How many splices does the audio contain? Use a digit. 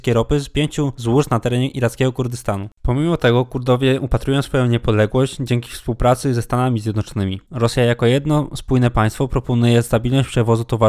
1